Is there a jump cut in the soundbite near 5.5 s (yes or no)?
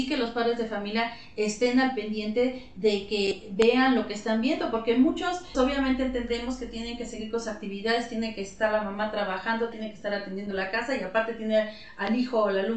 yes